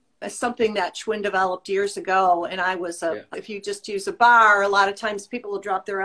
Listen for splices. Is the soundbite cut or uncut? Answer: cut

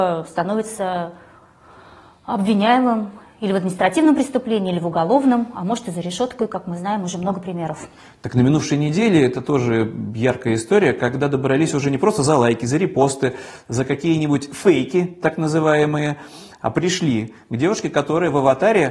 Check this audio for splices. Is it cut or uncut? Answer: uncut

